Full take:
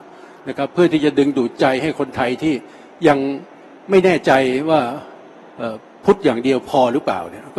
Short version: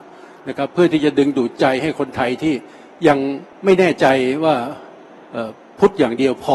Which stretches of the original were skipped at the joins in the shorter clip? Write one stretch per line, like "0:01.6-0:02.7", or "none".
0:03.5-0:03.8